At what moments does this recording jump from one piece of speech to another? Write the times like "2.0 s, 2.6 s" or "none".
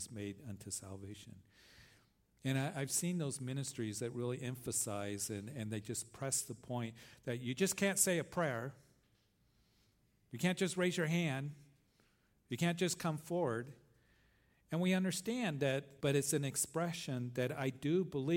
16.0 s